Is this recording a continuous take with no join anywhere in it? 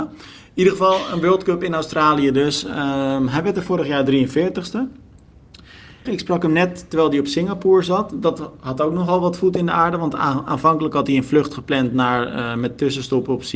no; 1 cut; at 6.1 s

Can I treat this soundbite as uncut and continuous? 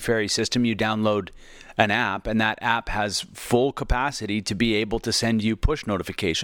yes; 0 cuts

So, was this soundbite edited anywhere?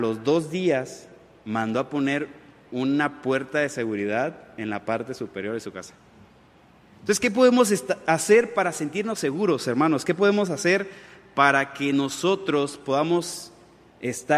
yes; 1 cut; at 6.8 s

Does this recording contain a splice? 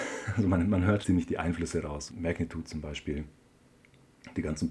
yes; 2 cuts; at 1.0 s, 2.1 s

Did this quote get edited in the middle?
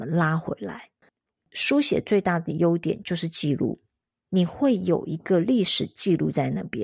yes; 1 cut; at 1.4 s

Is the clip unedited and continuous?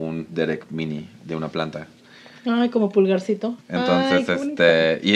yes; 0 cuts

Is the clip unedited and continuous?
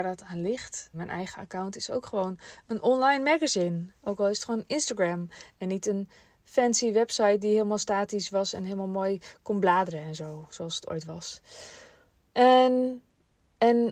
no; 1 cut; at 0.9 s

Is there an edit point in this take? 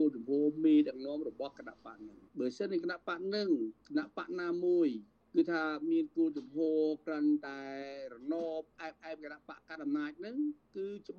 yes; 2 cuts; at 2.3 s, 3.8 s

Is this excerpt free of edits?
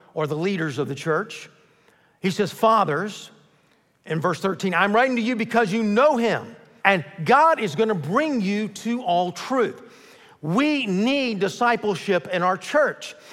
no; 1 cut; at 6.8 s

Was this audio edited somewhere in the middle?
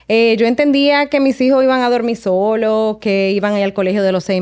no; 0 cuts

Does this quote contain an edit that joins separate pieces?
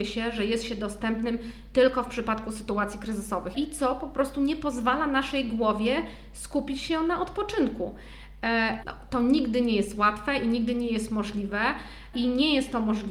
yes; 3 cuts; at 3.5 s, 8.8 s, 12.1 s

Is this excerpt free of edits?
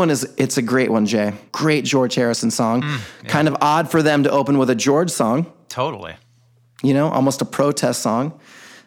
no; 1 cut; at 1.5 s

